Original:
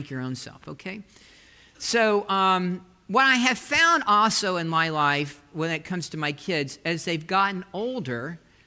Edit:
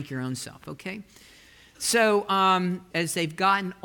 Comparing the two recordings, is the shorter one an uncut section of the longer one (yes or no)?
no